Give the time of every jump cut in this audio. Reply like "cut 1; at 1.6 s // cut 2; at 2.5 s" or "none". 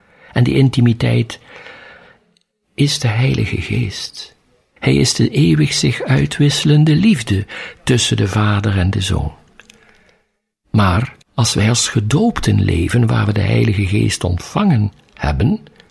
cut 1; at 4.8 s // cut 2; at 11.2 s